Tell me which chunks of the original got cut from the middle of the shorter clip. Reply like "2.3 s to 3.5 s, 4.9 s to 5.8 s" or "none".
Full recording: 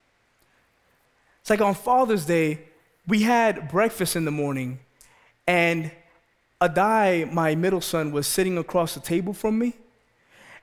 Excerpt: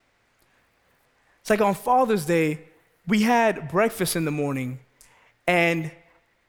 none